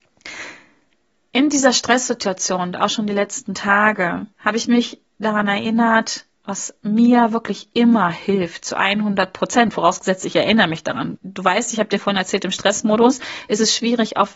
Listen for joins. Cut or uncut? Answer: cut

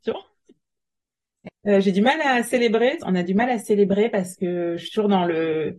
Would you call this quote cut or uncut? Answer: cut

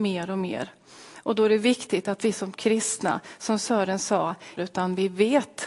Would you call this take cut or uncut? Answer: cut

